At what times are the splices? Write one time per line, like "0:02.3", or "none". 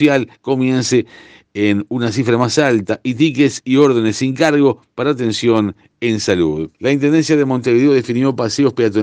0:06.7